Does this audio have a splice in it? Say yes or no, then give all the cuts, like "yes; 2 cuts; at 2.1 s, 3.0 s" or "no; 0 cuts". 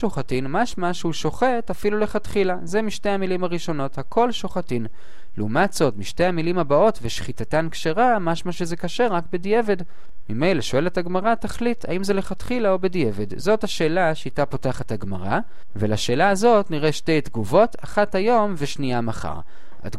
no; 0 cuts